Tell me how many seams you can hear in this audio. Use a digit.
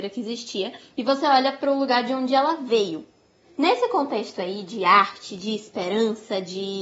1